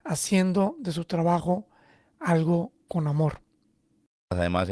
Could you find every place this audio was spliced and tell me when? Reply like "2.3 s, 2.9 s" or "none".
none